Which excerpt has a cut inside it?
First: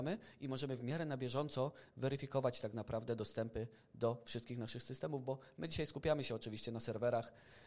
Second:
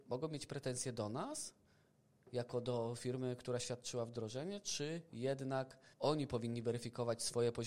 second; 1 cut; at 5.9 s

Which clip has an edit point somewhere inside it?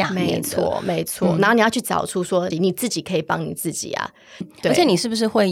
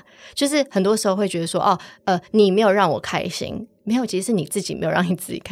first; 2 cuts; at 2.5 s, 4.4 s

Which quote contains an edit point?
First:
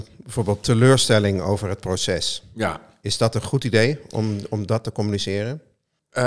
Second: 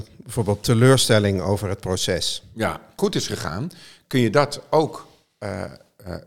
second; 1 cut; at 3.0 s

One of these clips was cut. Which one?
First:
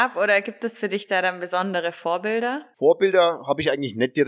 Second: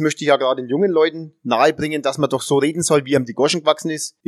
first; 1 cut; at 2.7 s

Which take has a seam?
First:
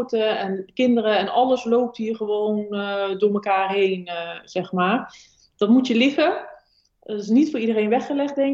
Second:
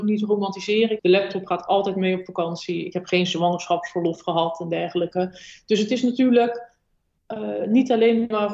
second; 1 cut; at 1.0 s

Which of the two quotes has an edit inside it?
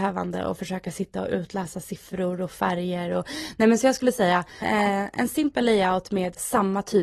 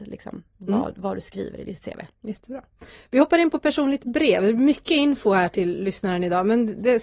first; 1 cut; at 4.6 s

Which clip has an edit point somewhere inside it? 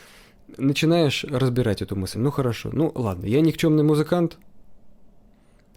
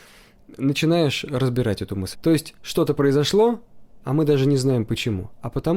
second; 2 cuts; at 2.1 s, 4.0 s

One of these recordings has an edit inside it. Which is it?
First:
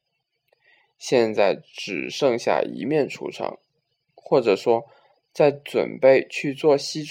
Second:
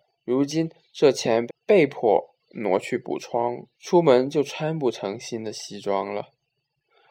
second; 2 cuts; at 1.5 s, 3.7 s

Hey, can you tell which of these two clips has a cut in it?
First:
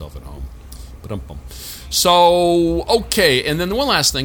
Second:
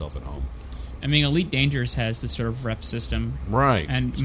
second; 1 cut; at 1.0 s

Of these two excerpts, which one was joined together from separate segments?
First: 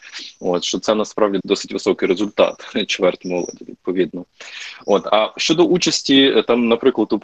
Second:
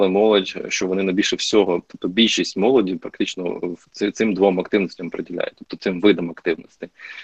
first; 1 cut; at 1.4 s

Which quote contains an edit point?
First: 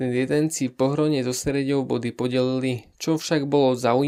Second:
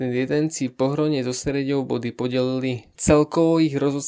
second; 1 cut; at 2.9 s

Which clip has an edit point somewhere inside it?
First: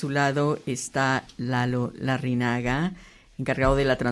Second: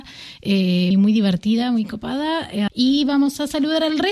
second; 2 cuts; at 0.9 s, 2.7 s

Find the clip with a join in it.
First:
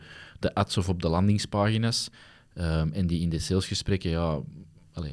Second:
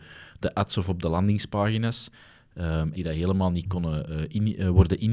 second; 1 cut; at 2.9 s

